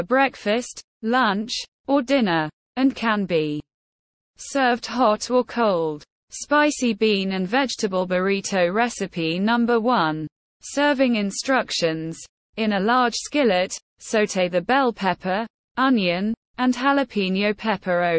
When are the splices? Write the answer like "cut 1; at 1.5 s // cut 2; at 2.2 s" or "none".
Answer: cut 1; at 10.5 s